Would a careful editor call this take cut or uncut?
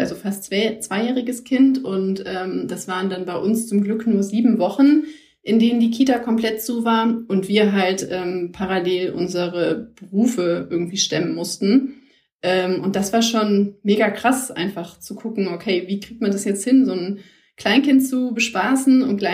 uncut